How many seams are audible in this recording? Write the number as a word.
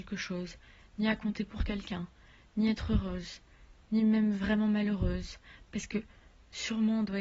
zero